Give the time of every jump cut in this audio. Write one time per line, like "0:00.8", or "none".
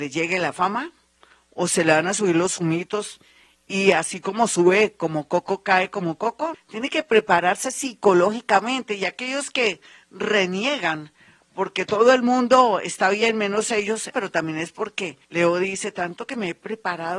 0:06.5
0:14.1
0:15.2